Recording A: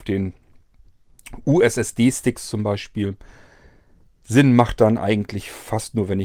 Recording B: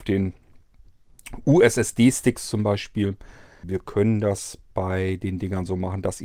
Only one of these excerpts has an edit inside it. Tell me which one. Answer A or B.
B